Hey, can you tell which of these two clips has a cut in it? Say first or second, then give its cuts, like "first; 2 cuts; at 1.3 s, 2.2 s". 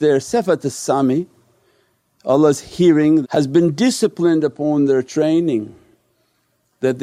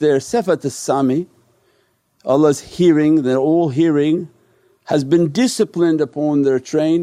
first; 1 cut; at 3.2 s